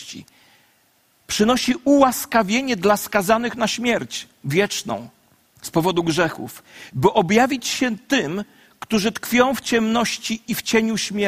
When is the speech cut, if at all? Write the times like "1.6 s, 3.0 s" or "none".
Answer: none